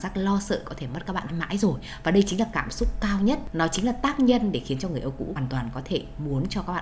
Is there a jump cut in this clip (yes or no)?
yes